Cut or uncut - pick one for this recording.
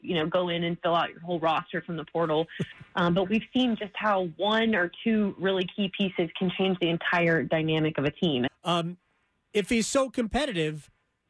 cut